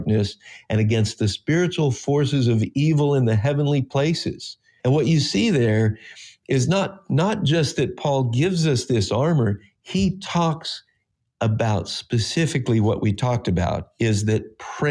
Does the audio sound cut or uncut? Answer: cut